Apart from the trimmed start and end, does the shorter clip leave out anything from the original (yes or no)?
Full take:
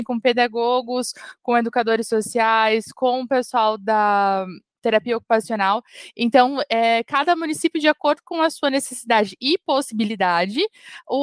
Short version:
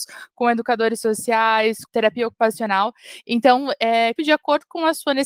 yes